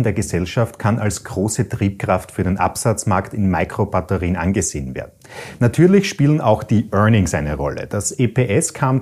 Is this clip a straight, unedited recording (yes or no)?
no